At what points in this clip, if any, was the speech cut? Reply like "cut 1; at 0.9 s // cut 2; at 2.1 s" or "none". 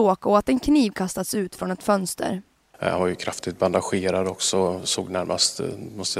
cut 1; at 2.7 s